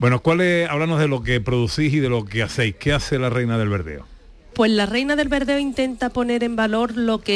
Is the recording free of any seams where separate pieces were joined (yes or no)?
yes